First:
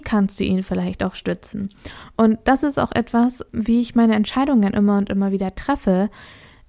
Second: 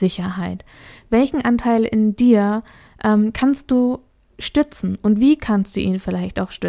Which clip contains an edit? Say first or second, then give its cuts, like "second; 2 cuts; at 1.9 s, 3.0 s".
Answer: first; 1 cut; at 3.5 s